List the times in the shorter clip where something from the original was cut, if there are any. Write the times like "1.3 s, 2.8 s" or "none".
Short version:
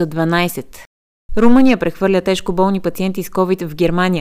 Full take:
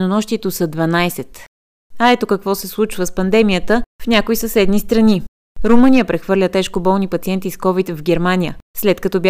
1.3 s